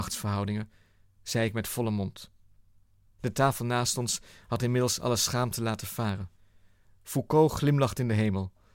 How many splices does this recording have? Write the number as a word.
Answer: zero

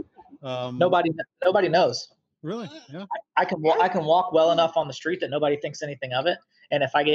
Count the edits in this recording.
zero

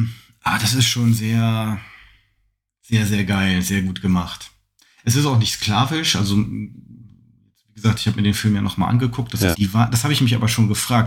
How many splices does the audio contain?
one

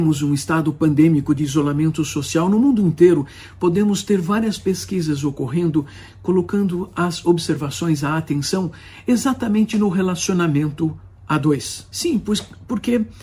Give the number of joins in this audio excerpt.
one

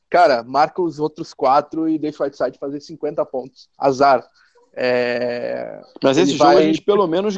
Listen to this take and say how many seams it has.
one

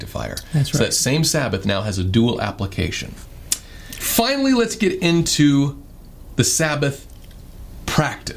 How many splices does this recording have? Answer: one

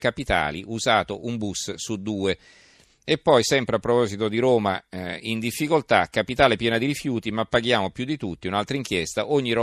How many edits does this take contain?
zero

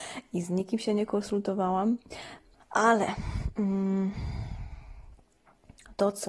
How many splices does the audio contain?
one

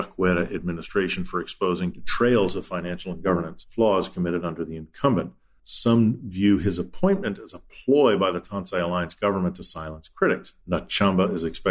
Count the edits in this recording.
one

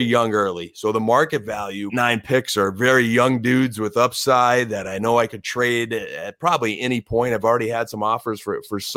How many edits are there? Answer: one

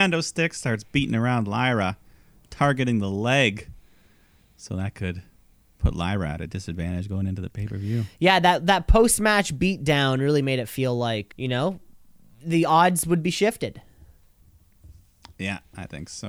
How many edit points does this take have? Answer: one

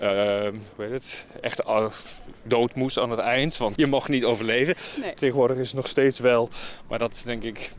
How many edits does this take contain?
two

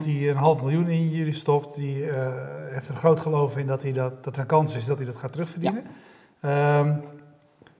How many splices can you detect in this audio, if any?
zero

